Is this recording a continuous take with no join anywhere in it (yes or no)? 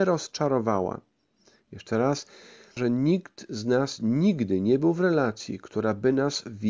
no